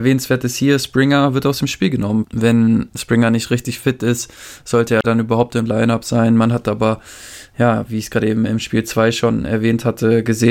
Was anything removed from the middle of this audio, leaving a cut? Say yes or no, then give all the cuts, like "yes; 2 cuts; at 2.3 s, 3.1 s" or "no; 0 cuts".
yes; 1 cut; at 2.2 s